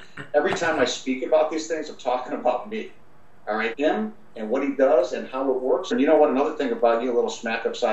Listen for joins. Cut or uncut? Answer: cut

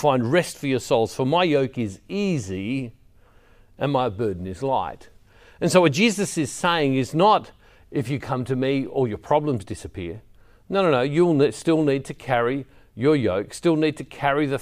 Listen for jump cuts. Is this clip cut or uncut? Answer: uncut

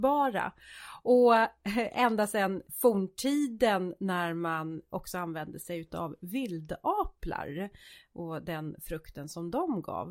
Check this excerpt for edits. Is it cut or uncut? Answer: cut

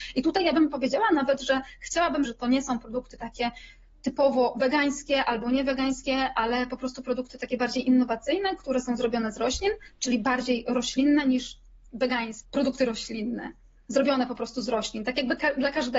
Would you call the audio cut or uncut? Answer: cut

